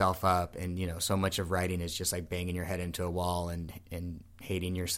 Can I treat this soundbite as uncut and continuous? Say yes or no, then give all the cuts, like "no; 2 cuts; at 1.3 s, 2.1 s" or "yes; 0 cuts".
yes; 0 cuts